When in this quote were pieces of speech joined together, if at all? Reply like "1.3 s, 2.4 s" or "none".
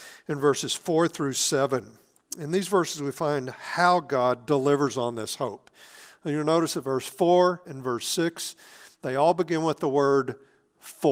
7.6 s